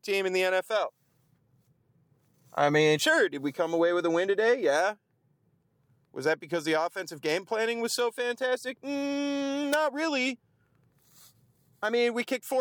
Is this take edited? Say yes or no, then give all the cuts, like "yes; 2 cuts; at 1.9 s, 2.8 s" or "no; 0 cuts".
no; 0 cuts